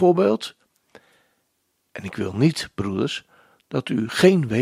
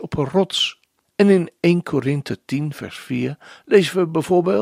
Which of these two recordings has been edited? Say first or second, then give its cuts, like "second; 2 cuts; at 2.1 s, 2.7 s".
second; 1 cut; at 1.0 s